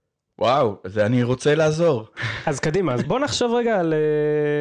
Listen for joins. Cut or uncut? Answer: cut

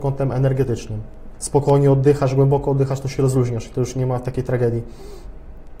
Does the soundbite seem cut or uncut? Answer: cut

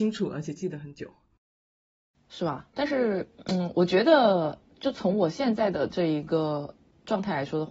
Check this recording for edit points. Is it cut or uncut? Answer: uncut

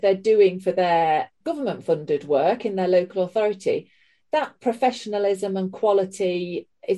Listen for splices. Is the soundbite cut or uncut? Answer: cut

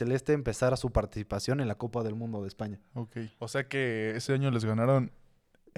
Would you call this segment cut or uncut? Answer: cut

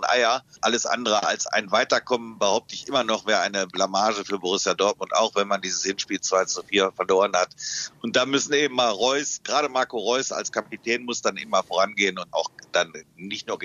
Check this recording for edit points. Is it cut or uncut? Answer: cut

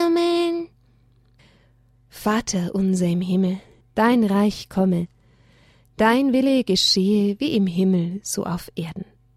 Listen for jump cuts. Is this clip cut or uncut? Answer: cut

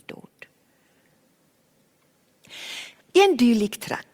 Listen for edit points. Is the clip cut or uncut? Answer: uncut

